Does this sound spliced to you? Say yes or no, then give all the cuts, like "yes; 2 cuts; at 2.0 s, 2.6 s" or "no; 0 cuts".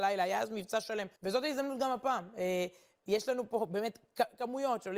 yes; 1 cut; at 1.2 s